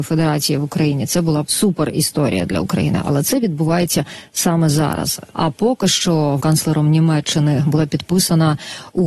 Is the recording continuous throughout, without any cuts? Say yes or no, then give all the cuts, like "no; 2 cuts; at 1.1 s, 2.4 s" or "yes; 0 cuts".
no; 3 cuts; at 1.5 s, 5.3 s, 6.4 s